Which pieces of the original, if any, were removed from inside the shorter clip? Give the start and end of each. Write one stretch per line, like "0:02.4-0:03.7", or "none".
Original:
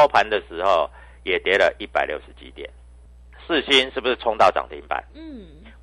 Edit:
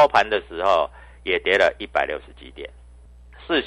none